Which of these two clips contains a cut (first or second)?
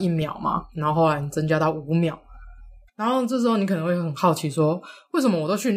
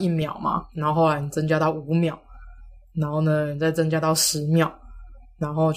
first